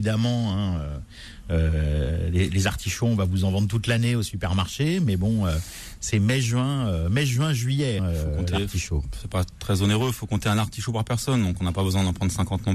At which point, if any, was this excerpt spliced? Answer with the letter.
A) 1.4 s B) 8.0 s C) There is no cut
B